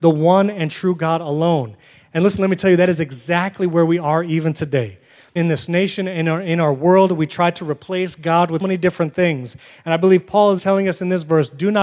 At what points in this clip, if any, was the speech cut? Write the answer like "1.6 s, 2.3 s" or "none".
5.4 s, 8.6 s, 10.6 s